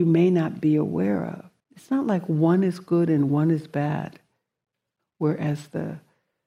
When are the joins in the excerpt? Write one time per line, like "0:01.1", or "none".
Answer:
0:01.6
0:05.0

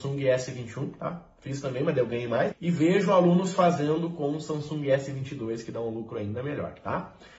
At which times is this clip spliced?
0:02.5

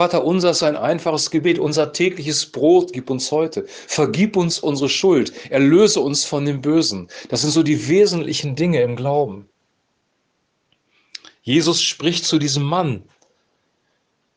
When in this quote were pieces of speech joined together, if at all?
none

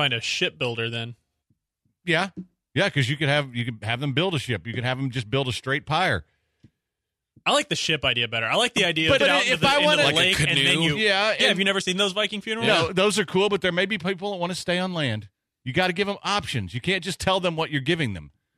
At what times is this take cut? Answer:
0:09.2

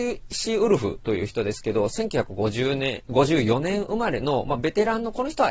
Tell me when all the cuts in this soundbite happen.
none

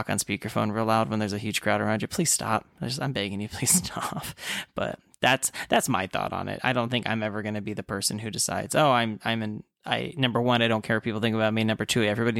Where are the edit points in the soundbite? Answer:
none

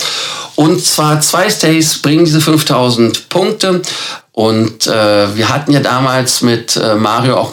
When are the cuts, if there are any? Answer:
0:04.2

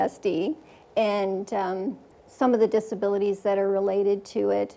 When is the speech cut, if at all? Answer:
0:02.1

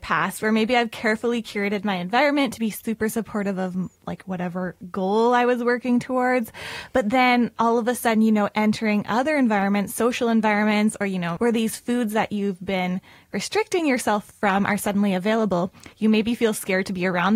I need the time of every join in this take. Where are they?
0:11.4

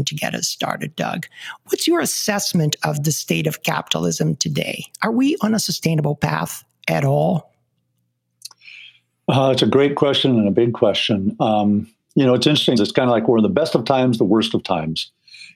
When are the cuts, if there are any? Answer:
0:12.8

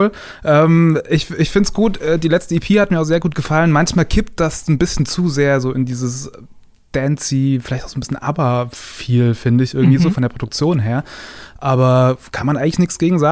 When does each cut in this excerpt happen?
none

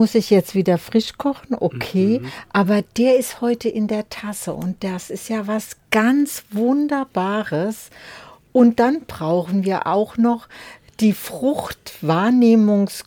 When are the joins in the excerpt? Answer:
none

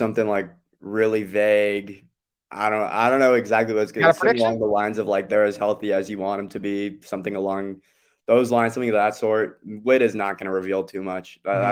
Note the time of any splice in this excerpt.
none

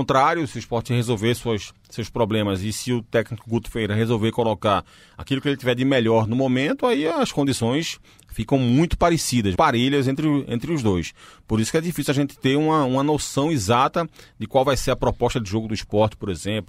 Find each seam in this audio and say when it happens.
0:09.5

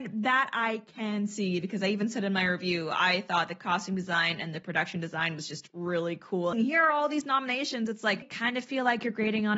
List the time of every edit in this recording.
0:06.5
0:08.2

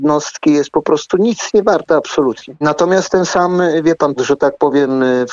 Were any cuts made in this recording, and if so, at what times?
0:02.6
0:04.2

